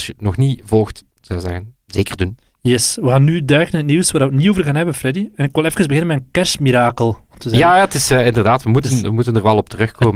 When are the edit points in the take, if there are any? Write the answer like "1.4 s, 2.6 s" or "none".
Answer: 1.1 s